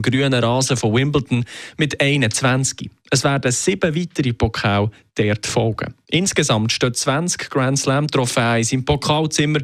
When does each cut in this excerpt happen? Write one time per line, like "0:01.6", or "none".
none